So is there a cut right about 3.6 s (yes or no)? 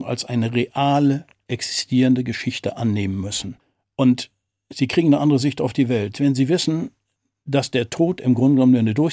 no